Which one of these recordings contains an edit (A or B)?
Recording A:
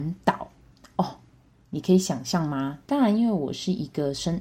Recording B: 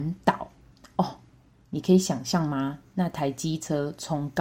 A